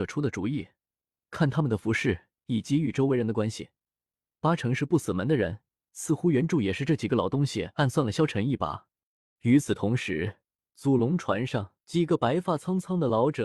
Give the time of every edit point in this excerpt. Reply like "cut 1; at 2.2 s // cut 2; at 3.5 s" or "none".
cut 1; at 9.4 s // cut 2; at 11.8 s